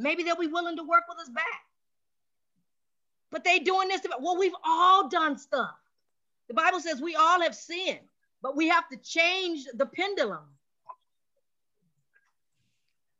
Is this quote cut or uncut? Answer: uncut